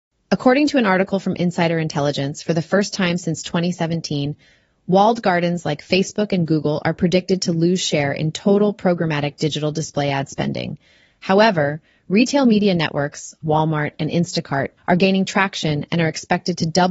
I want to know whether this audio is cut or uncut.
cut